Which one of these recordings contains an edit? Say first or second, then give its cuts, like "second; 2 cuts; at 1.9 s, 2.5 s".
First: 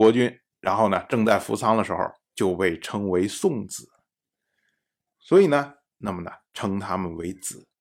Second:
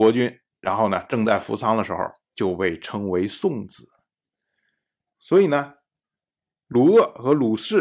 first; 1 cut; at 5.9 s